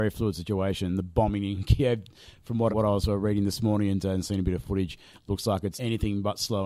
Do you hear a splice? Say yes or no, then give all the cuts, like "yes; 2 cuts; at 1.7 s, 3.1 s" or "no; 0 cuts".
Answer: yes; 2 cuts; at 2.7 s, 5.7 s